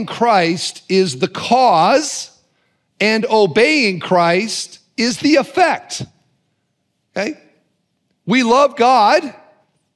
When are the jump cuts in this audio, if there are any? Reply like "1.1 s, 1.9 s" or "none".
none